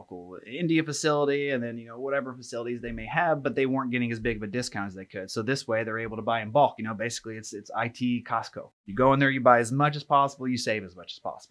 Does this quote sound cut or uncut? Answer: uncut